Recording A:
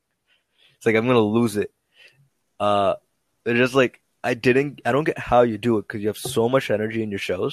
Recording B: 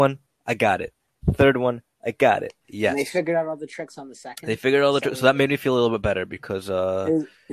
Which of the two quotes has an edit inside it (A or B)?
B